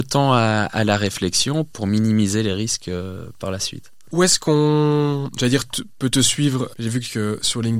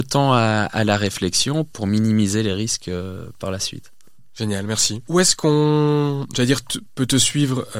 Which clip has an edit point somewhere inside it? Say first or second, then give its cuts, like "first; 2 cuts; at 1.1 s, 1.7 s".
first; 2 cuts; at 4.1 s, 6.7 s